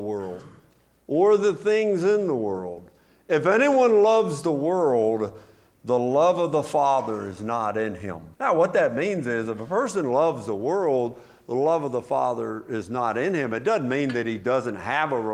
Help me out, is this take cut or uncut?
cut